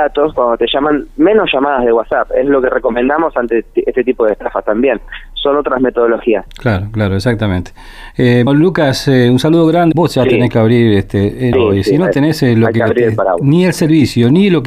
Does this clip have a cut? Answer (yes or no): yes